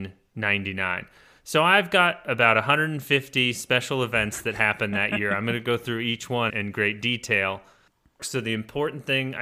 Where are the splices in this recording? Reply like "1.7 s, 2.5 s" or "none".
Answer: 6.5 s, 8.2 s